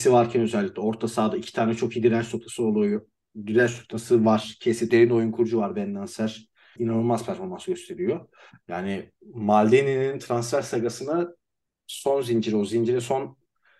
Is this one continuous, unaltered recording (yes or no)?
no